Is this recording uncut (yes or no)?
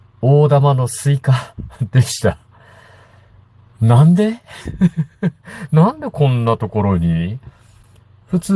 yes